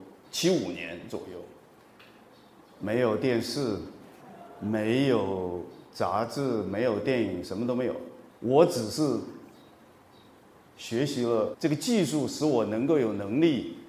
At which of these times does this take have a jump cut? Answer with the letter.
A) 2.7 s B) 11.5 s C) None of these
B